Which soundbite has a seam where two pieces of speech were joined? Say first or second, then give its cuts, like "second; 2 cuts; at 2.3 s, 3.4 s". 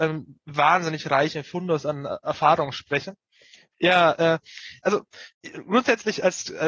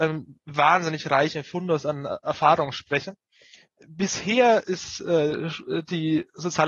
first; 2 cuts; at 3.7 s, 5.3 s